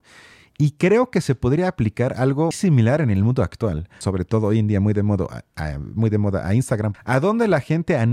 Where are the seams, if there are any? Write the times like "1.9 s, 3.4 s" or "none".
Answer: 2.5 s, 4.0 s, 6.9 s